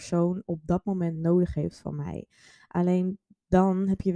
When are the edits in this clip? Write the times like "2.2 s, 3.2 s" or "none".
none